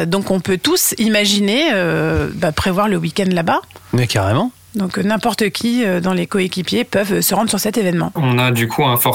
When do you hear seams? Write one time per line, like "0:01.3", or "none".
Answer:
0:08.2